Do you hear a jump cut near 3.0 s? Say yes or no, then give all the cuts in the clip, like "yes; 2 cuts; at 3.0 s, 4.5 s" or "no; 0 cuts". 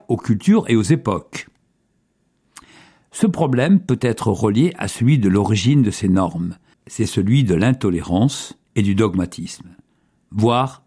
no; 2 cuts; at 6.7 s, 8.6 s